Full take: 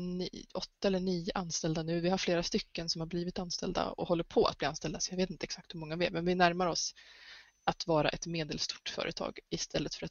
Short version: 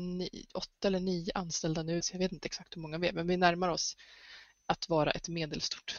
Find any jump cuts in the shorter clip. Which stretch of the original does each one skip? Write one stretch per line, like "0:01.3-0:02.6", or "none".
0:02.0-0:05.0